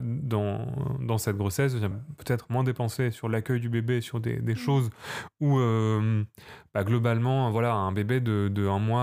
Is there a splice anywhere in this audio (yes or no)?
yes